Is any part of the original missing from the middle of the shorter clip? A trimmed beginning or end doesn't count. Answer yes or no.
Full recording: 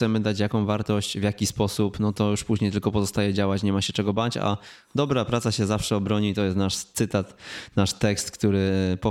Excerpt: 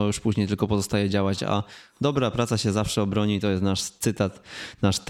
yes